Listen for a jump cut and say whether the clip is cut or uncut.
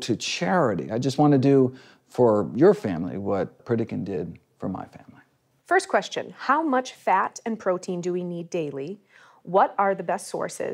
cut